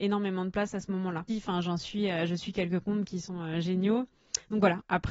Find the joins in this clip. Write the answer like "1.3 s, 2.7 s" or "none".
1.3 s